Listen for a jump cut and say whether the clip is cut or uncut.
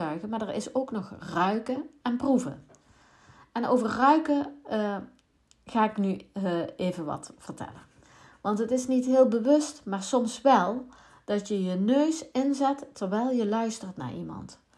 uncut